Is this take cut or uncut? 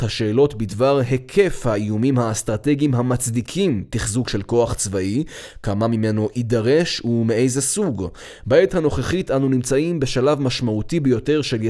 uncut